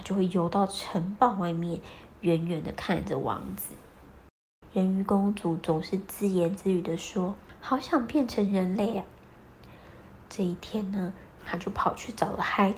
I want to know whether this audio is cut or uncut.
cut